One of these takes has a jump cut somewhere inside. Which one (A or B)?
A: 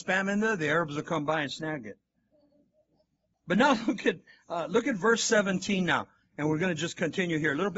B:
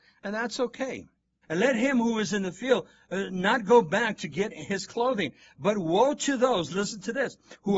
B